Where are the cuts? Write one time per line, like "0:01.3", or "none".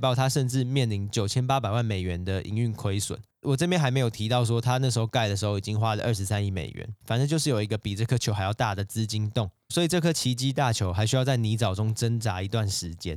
none